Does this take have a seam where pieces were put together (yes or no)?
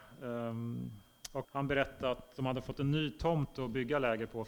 yes